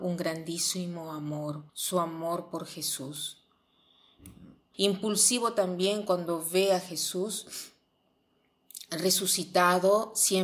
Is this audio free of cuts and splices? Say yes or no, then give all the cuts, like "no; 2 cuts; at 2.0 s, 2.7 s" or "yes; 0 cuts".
no; 2 cuts; at 1.7 s, 4.7 s